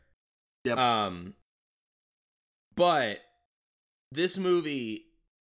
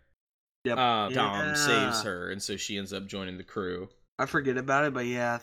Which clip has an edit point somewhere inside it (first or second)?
second